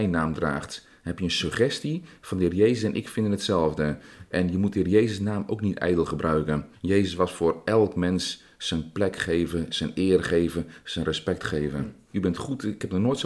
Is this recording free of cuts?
no; 2 cuts; at 6.7 s, 12.1 s

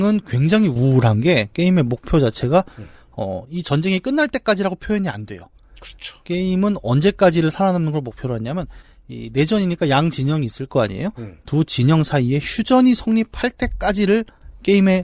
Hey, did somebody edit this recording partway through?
no; 0 cuts

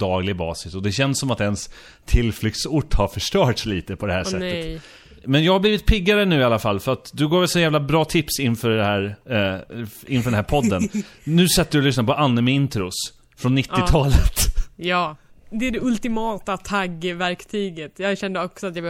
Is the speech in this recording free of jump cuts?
yes; 0 cuts

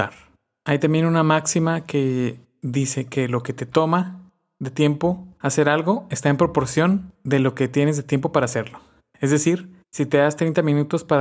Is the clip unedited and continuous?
no; 1 cut; at 9.8 s

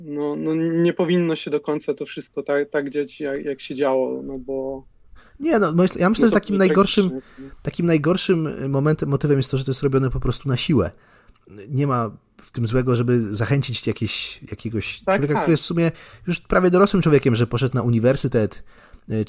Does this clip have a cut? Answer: no; 0 cuts

